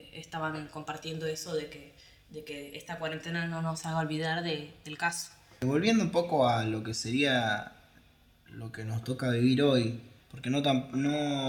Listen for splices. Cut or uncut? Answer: cut